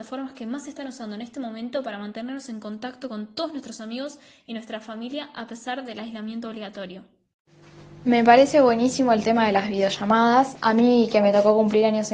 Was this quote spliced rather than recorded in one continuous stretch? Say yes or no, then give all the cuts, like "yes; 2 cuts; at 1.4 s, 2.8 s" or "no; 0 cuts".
no; 0 cuts